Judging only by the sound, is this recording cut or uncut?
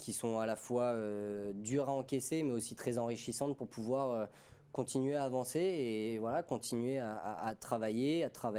uncut